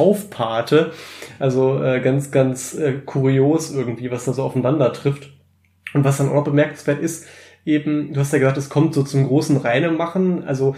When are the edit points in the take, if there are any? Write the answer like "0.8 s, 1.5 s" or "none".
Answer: none